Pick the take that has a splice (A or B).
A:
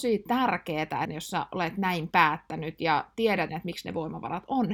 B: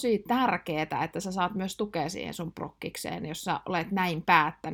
A